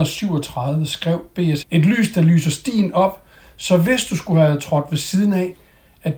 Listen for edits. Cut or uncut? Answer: cut